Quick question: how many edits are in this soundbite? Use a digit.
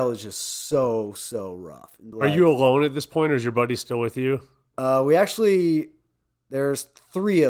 1